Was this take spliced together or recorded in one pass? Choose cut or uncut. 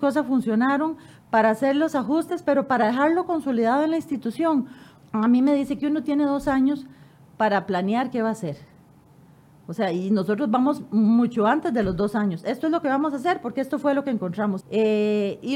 cut